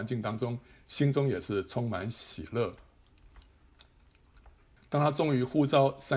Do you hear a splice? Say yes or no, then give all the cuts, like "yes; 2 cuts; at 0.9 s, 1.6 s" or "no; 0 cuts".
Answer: yes; 1 cut; at 4.8 s